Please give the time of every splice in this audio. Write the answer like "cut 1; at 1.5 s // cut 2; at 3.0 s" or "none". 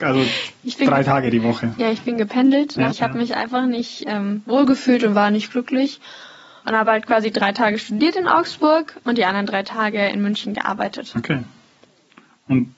cut 1; at 2.9 s // cut 2; at 6.6 s // cut 3; at 9.0 s